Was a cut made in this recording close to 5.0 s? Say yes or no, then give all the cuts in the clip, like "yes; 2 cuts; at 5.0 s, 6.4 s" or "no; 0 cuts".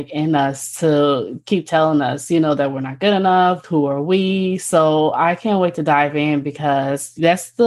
no; 1 cut; at 3.6 s